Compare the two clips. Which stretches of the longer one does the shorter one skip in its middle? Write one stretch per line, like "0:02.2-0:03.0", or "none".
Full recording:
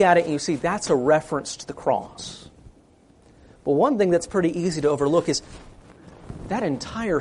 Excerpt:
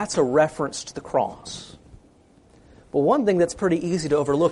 none